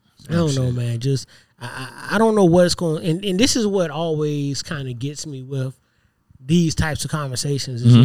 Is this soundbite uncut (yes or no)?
yes